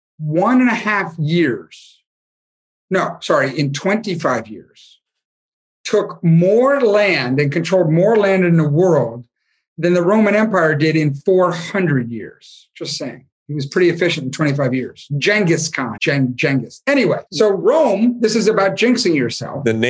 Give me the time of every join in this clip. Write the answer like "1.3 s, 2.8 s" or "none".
16.0 s, 17.3 s